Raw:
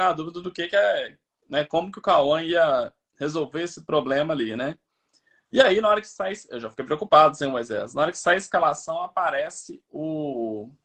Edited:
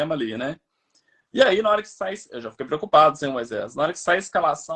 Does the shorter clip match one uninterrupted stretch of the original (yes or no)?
yes